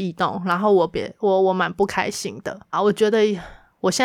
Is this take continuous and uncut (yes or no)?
no